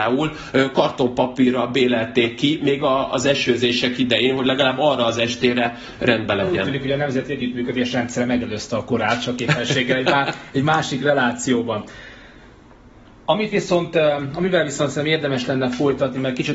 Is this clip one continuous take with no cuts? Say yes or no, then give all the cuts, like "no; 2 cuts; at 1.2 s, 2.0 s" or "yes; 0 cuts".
yes; 0 cuts